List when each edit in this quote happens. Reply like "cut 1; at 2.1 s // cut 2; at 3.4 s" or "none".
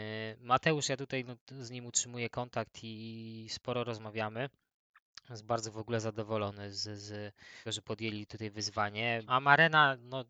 cut 1; at 7.7 s // cut 2; at 9.3 s